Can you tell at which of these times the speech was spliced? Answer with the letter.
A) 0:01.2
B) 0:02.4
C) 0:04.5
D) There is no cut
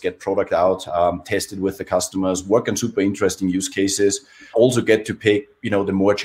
C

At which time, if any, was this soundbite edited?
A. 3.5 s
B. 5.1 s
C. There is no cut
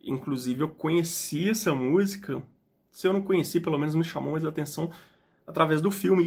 C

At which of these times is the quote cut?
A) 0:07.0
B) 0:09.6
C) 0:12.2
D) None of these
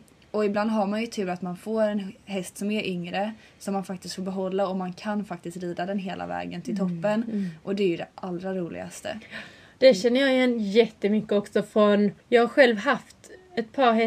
C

